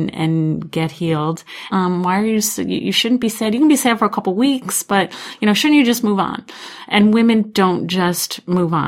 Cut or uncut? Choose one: cut